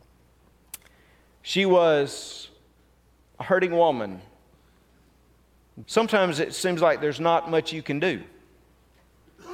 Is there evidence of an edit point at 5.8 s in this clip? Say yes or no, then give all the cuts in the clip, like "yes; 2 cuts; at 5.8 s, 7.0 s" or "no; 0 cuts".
yes; 1 cut; at 5.8 s